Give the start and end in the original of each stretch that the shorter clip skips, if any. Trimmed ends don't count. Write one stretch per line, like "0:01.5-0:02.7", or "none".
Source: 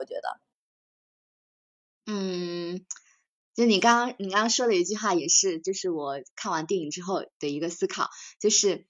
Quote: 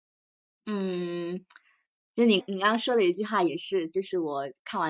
0:03.8-0:04.1